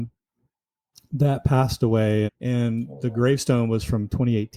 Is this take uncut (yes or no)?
no